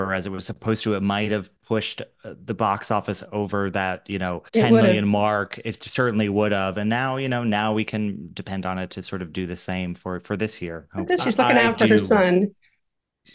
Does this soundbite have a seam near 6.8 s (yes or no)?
no